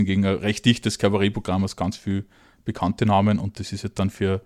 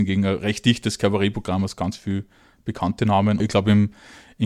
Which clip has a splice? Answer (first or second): second